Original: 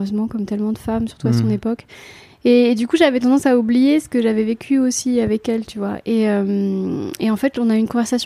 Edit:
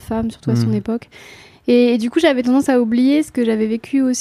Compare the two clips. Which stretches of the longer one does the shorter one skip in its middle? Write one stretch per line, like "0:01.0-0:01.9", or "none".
none